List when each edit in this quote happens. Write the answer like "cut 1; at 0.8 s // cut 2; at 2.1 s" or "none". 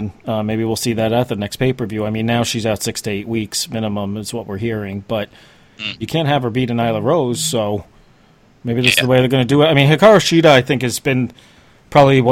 cut 1; at 6.0 s